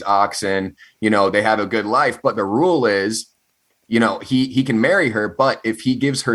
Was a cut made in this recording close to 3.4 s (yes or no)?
no